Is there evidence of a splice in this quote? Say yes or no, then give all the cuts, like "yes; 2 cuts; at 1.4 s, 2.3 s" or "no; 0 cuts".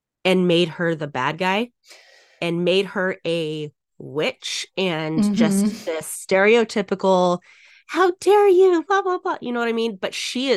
no; 0 cuts